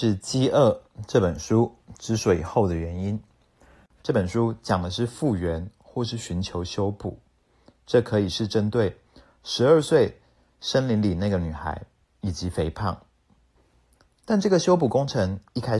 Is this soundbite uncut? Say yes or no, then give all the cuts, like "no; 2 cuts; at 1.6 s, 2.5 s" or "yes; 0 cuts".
no; 1 cut; at 3.9 s